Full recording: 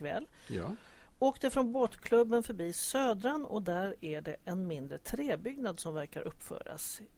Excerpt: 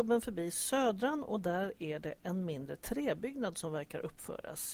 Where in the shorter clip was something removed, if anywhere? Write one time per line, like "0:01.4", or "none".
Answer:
none